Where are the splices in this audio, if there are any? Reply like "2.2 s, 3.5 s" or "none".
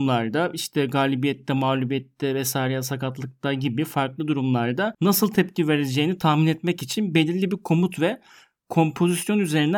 none